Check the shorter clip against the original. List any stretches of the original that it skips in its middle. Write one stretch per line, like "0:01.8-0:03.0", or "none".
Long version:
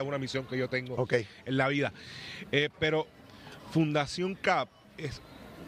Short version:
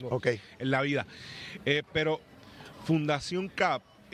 none